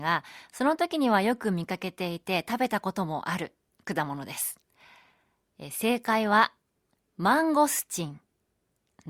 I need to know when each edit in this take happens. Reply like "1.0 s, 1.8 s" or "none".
none